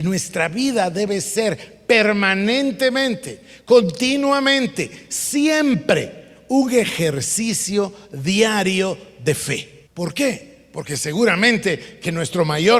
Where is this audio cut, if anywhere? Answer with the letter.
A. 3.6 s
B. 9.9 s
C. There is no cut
B